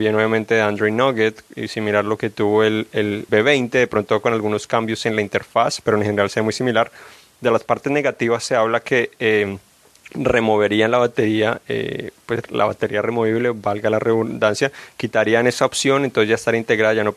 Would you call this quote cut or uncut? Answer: cut